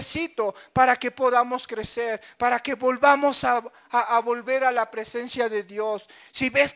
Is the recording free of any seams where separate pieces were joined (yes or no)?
yes